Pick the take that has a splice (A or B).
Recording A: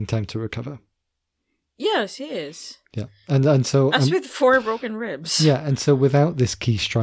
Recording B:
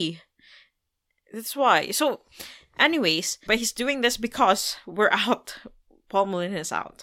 B